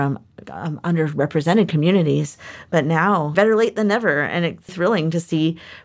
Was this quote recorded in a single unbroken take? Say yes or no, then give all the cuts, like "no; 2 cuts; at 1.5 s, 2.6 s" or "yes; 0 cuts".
no; 2 cuts; at 3.3 s, 4.7 s